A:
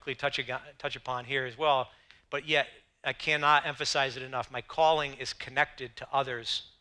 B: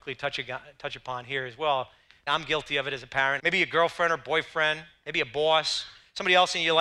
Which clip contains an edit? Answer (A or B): B